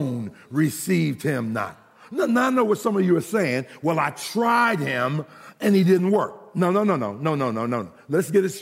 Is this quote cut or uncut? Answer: uncut